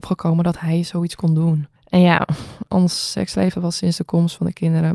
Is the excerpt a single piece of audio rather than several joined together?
no; 1 cut; at 1.8 s

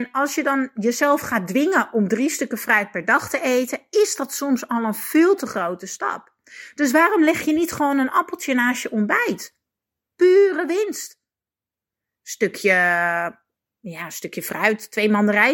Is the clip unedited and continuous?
yes; 0 cuts

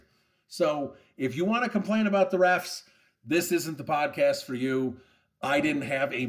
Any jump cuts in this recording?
no; 0 cuts

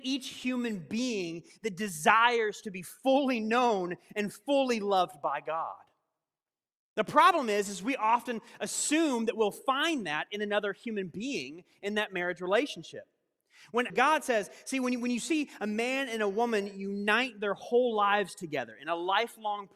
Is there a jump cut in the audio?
yes; 1 cut; at 13.9 s

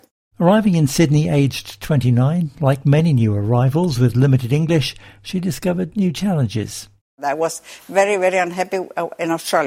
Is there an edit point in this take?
no; 0 cuts

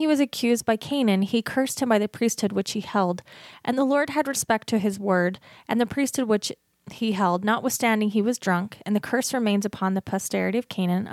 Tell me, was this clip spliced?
no; 0 cuts

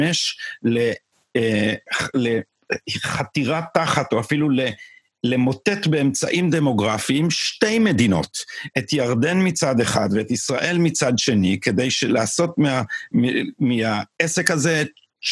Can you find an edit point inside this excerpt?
no; 0 cuts

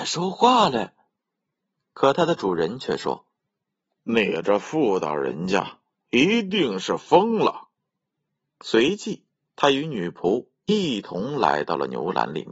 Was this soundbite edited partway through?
no; 0 cuts

